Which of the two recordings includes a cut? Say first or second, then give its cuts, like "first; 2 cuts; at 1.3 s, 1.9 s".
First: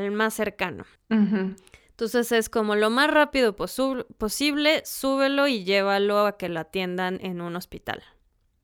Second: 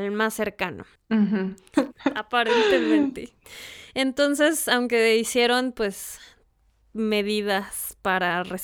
second; 1 cut; at 1.7 s